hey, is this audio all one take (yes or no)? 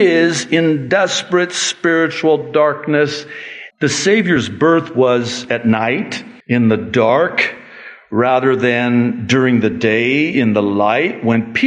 no